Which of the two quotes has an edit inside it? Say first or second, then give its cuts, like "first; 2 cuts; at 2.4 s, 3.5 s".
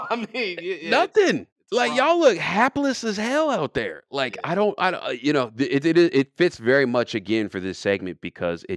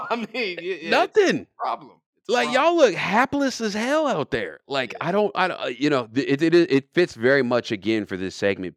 first; 1 cut; at 1.5 s